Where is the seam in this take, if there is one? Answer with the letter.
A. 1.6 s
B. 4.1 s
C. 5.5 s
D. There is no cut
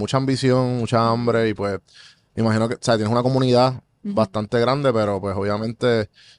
D